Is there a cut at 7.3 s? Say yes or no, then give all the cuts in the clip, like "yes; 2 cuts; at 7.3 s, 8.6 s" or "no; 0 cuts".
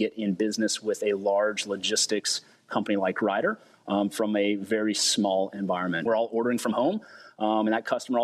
no; 1 cut; at 6.1 s